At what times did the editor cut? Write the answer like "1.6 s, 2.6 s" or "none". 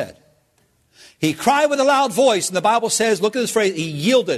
none